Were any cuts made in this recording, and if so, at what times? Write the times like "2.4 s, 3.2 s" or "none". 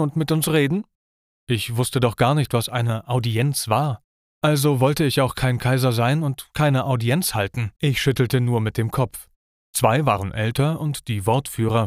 7.8 s, 9.5 s